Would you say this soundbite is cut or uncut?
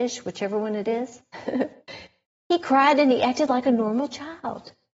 uncut